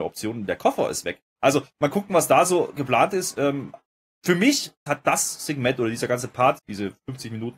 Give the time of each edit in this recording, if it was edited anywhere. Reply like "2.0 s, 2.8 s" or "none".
4.9 s, 6.6 s